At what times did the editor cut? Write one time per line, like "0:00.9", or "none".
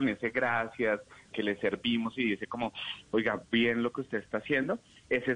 0:01.3